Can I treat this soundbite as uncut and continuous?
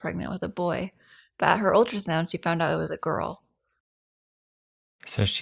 yes; 0 cuts

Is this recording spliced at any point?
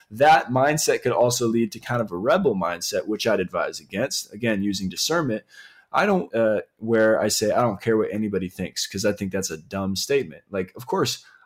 yes; 1 cut; at 6.3 s

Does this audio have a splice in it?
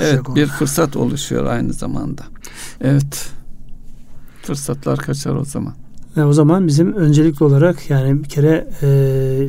yes; 1 cut; at 2.8 s

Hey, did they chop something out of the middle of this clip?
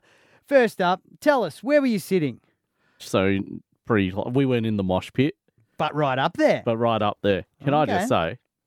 yes; 1 cut; at 3.0 s

